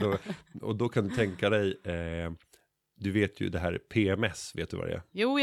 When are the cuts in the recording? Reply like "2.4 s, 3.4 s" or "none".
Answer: none